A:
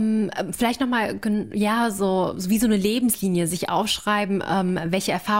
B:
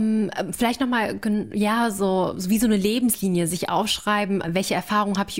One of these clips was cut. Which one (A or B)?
B